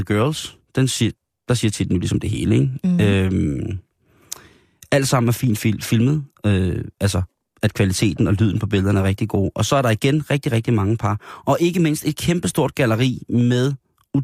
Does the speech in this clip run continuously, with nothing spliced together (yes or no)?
yes